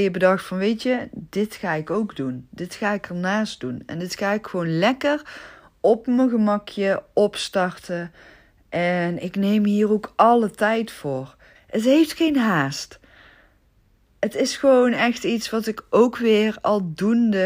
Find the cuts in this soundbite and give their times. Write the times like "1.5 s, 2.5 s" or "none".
11.5 s